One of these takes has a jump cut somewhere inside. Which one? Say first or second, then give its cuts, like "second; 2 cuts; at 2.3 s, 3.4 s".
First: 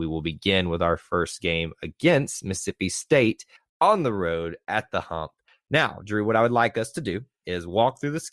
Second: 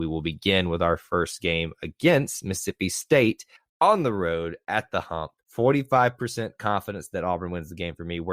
second; 1 cut; at 5.4 s